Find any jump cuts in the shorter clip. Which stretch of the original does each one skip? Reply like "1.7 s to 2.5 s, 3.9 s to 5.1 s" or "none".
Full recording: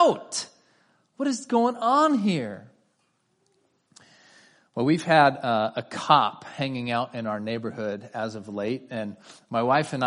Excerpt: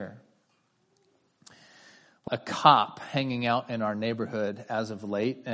4.8 s to 5.7 s